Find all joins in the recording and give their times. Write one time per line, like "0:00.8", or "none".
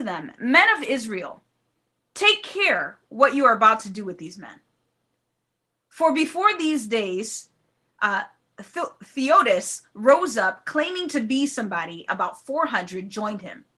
0:12.1